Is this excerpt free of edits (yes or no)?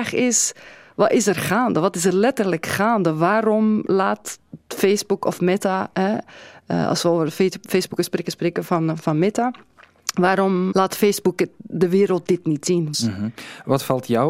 no